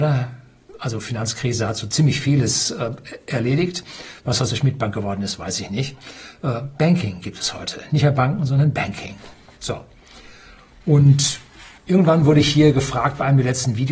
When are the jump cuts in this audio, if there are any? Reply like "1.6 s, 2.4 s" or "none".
none